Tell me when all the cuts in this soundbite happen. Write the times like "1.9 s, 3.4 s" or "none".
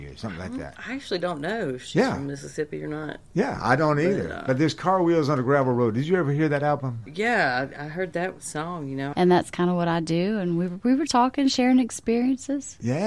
9.1 s, 11.1 s